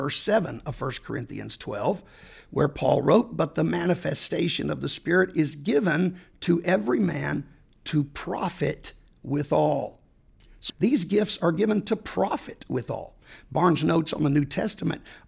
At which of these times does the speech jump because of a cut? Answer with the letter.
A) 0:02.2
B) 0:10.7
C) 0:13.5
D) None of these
B